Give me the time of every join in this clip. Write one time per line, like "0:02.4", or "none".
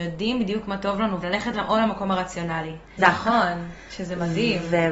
0:01.2
0:03.0